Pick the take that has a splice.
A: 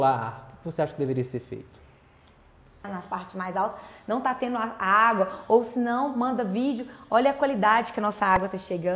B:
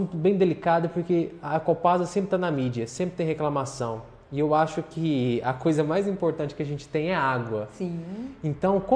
A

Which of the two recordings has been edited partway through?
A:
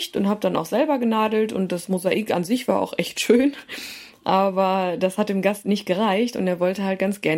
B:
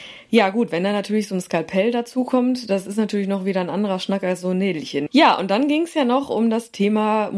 B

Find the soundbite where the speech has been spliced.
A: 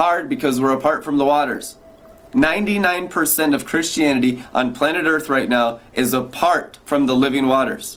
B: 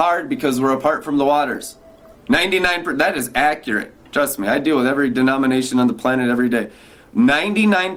B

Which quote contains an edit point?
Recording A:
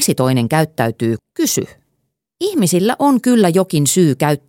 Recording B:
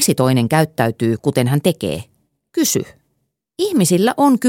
A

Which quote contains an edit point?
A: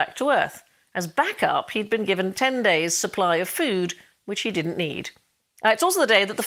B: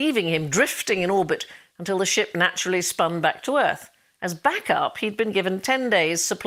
A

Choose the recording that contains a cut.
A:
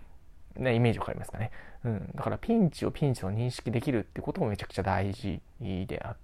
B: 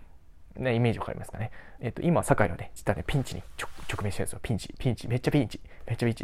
B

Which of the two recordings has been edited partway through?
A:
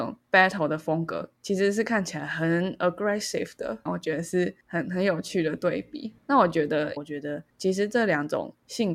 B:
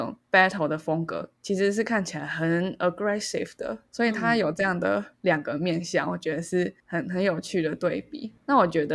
A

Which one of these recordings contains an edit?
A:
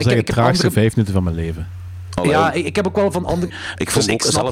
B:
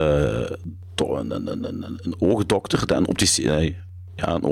A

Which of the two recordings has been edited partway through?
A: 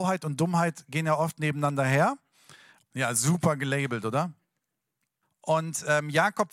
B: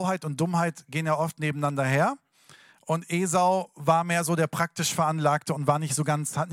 A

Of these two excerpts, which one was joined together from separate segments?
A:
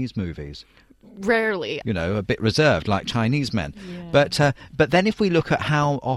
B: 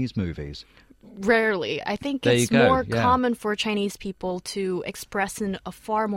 A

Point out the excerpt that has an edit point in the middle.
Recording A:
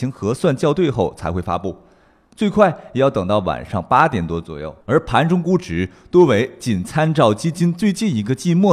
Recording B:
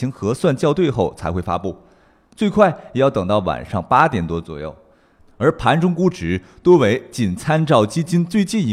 A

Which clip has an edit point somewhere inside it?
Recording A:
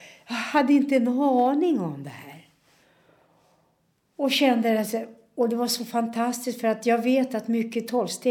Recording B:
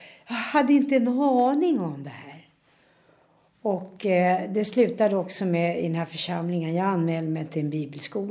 B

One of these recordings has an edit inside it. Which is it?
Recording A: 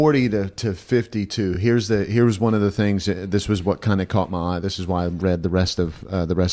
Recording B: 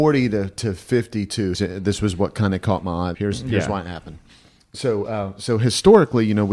B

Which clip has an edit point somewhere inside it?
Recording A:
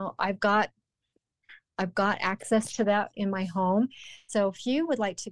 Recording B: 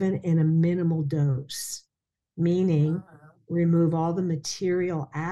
A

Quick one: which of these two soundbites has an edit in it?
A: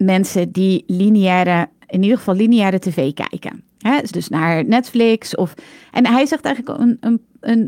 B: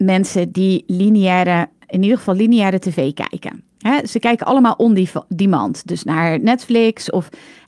A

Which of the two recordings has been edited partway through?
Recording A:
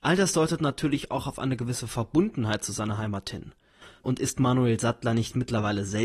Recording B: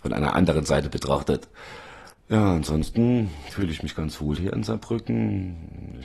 A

